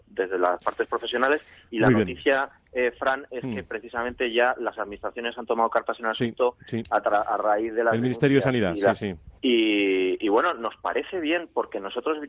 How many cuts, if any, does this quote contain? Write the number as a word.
one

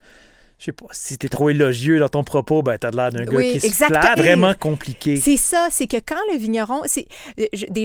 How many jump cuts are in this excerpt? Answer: one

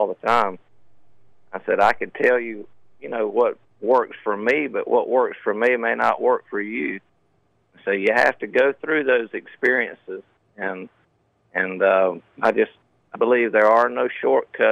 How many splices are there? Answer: one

